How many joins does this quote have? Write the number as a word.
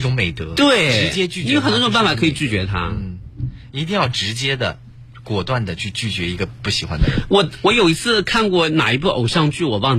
zero